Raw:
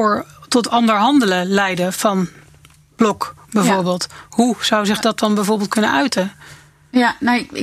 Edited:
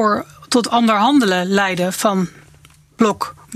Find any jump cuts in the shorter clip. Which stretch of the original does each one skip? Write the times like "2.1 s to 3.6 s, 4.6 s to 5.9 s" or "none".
none